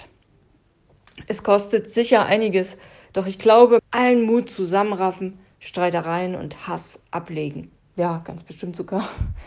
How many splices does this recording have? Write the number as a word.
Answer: two